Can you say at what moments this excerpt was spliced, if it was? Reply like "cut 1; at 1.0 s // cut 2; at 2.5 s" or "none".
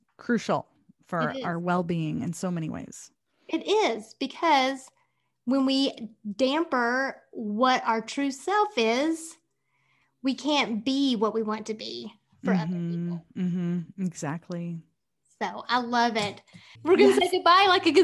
cut 1; at 16.8 s